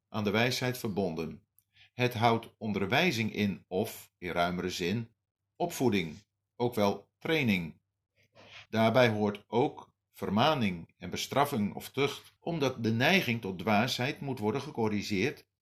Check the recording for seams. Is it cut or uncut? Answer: cut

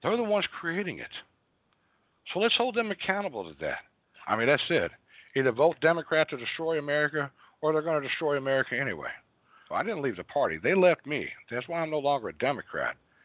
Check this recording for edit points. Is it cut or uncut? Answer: cut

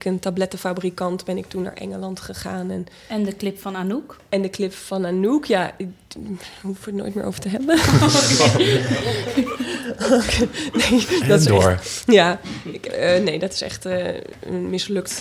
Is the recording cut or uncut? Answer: uncut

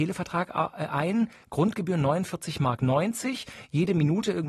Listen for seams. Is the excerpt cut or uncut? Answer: uncut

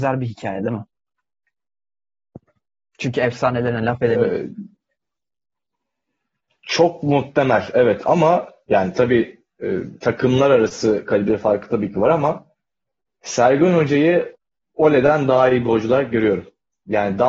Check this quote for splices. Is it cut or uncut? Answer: uncut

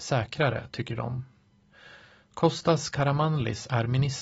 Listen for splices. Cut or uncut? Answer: uncut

